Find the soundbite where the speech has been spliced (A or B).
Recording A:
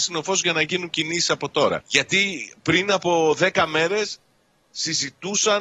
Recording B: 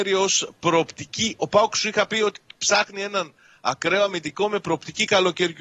A